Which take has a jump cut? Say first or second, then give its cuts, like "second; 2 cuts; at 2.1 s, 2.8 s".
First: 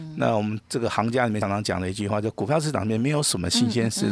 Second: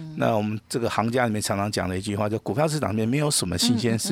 first; 1 cut; at 1.4 s